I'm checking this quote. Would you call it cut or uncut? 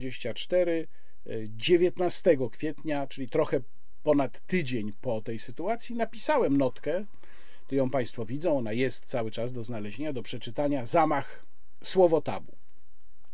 uncut